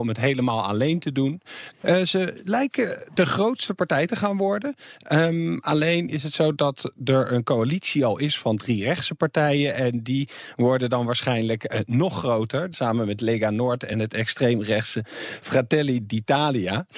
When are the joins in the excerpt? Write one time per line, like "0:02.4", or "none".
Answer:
0:01.7
0:12.7